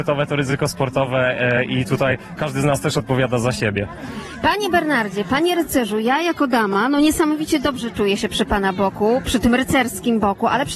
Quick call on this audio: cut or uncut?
uncut